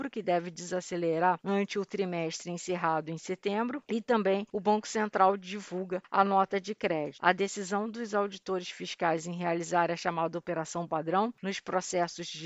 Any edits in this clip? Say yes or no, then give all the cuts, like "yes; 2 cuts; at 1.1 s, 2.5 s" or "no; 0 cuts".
yes; 1 cut; at 7.2 s